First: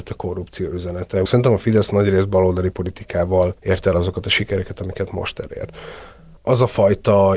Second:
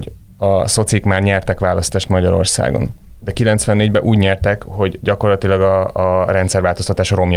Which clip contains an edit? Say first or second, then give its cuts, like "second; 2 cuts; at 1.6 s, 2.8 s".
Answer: first; 2 cuts; at 1.3 s, 3.6 s